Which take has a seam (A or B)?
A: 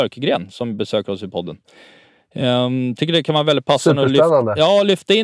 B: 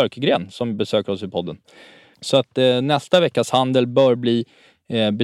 B